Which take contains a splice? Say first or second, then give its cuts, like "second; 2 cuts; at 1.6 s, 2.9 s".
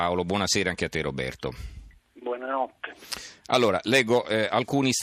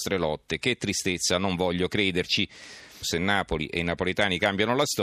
second; 1 cut; at 3.0 s